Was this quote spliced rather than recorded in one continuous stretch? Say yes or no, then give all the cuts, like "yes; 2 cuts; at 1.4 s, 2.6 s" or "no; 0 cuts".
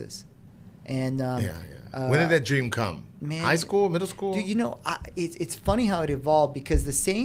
no; 0 cuts